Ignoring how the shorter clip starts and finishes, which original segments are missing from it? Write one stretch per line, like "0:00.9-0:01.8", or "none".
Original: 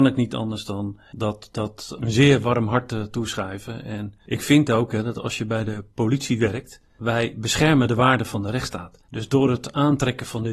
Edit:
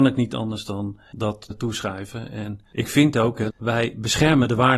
0:01.5-0:03.0
0:05.0-0:06.9